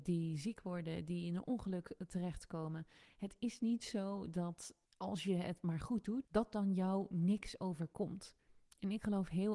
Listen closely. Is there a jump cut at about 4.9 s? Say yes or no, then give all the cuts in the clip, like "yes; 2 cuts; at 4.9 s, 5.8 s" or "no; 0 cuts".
yes; 2 cuts; at 4.9 s, 6.2 s